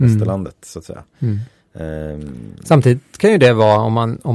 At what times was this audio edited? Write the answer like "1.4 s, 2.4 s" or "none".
none